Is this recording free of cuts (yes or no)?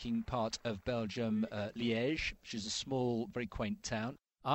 yes